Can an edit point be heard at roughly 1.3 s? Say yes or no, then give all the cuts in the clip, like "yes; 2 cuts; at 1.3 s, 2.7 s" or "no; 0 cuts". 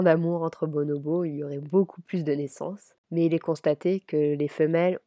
no; 1 cut; at 3.0 s